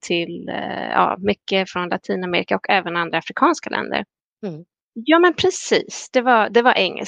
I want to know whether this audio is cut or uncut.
cut